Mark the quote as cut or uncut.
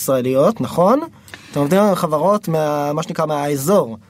uncut